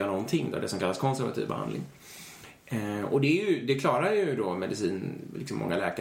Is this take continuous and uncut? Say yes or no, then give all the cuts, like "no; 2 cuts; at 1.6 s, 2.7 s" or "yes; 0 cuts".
yes; 0 cuts